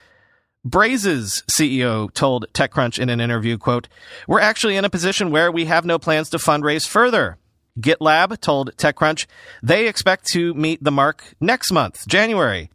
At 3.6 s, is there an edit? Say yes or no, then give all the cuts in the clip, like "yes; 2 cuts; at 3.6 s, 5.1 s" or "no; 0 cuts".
no; 1 cut; at 7.7 s